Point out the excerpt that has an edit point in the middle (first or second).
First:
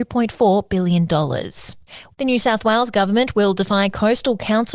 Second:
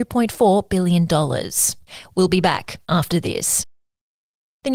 first